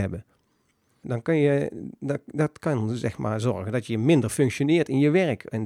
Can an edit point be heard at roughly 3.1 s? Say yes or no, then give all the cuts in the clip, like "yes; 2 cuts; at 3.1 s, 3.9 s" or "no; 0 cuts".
no; 1 cut; at 1.0 s